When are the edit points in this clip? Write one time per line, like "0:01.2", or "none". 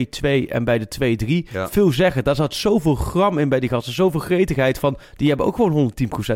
none